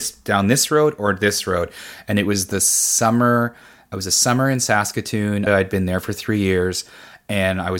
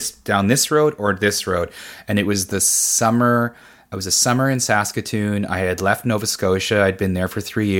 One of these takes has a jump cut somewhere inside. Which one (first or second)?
first